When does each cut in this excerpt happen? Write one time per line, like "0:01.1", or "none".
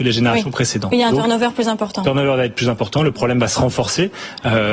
none